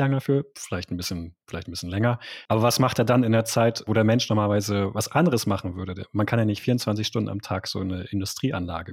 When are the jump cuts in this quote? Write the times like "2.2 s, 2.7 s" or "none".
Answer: 2.5 s